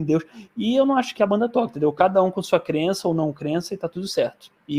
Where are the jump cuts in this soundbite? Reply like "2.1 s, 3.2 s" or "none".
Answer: 1.2 s

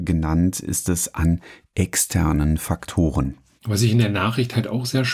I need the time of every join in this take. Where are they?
3.6 s

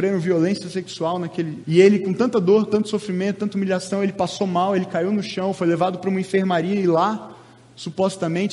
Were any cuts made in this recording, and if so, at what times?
1.6 s

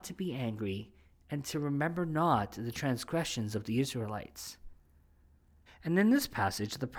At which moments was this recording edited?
5.7 s

